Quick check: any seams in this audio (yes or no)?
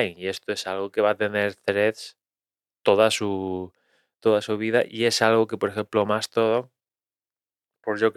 no